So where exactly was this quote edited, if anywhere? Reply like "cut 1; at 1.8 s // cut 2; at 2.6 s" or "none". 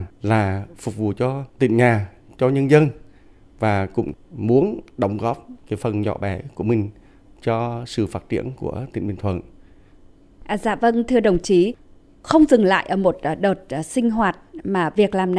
cut 1; at 1.5 s

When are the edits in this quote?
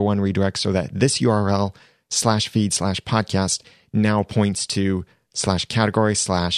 none

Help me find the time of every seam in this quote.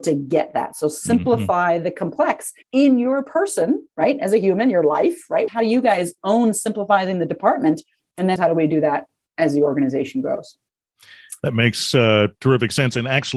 cut 1; at 2.6 s // cut 2; at 5.5 s // cut 3; at 8.4 s

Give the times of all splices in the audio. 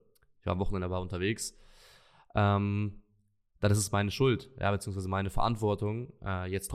none

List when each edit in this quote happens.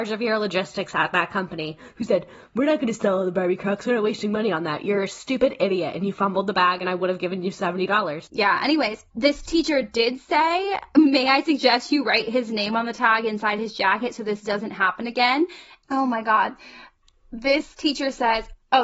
cut 1; at 8.3 s // cut 2; at 15.8 s

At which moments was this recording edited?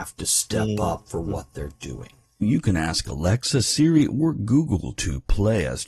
cut 1; at 2.4 s

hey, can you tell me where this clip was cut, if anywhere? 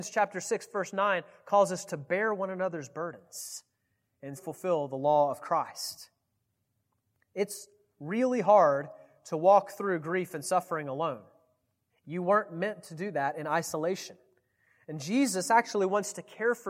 cut 1; at 4.4 s // cut 2; at 11.9 s

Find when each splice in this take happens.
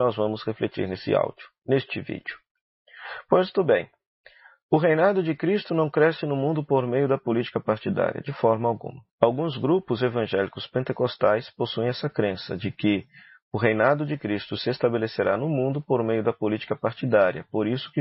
cut 1; at 9.1 s

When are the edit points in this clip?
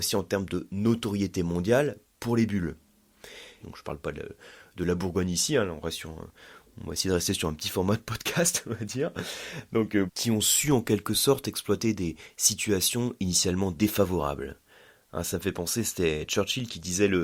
cut 1; at 3.6 s // cut 2; at 10.1 s

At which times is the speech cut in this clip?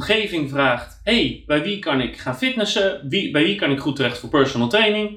none

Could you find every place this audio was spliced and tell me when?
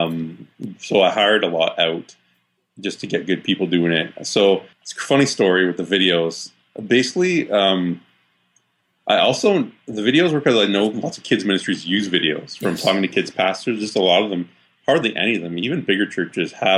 cut 1; at 4.7 s

